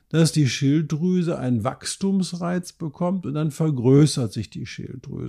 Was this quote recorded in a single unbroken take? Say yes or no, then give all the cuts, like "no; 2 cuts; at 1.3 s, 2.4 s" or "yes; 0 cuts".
yes; 0 cuts